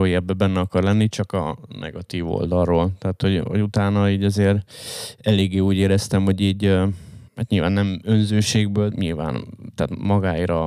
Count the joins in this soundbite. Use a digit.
2